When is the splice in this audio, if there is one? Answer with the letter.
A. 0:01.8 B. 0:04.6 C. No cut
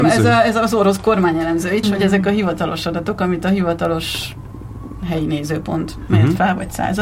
A